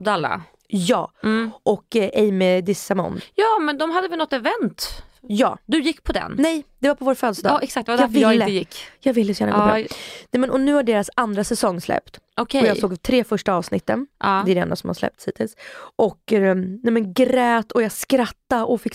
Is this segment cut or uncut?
uncut